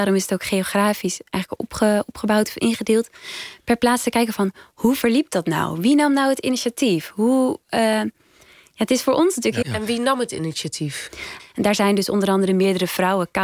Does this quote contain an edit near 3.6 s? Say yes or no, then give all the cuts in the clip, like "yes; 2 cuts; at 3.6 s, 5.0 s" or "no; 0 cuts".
no; 2 cuts; at 9.6 s, 11.4 s